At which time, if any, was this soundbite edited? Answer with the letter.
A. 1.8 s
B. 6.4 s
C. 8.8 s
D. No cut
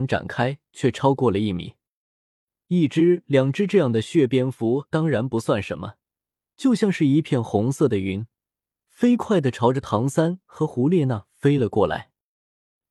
B